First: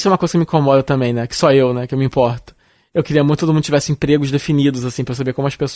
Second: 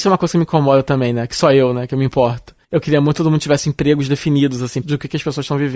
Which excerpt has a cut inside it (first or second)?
second